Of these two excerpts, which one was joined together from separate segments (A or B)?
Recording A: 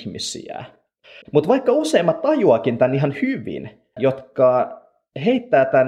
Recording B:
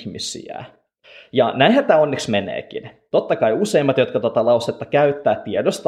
A